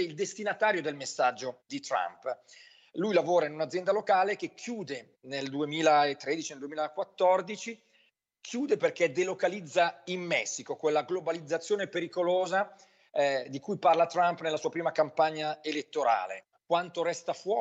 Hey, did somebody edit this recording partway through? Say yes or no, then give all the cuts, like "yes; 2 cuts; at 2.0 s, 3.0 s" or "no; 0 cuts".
yes; 1 cut; at 16.5 s